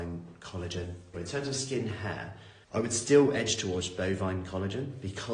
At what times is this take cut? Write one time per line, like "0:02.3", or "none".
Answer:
0:01.1
0:02.6